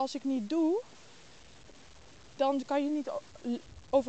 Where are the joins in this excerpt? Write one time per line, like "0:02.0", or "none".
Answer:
0:02.4